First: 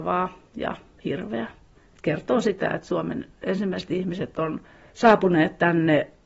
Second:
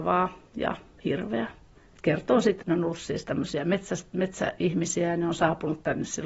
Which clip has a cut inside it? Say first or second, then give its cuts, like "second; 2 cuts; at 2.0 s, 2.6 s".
second; 1 cut; at 2.6 s